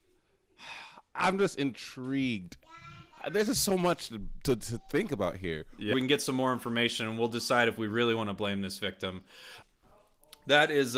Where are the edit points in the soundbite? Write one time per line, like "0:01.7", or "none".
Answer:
0:05.9
0:09.6